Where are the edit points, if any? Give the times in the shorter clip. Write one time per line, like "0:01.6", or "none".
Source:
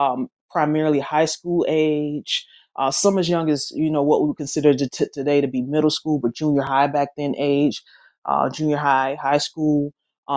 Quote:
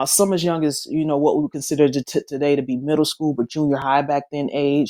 none